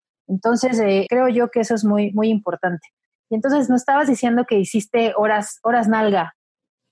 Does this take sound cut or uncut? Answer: cut